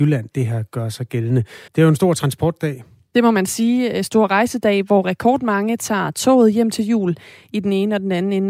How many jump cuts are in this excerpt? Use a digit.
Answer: 1